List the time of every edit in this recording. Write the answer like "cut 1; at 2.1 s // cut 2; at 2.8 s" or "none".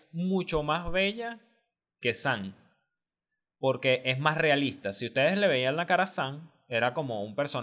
none